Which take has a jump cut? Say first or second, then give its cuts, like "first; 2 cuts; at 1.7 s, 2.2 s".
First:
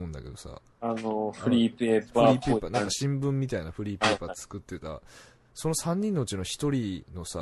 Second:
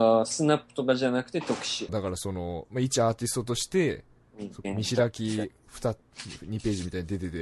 second; 2 cuts; at 1.9 s, 4.6 s